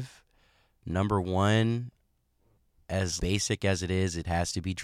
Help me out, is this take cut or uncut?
cut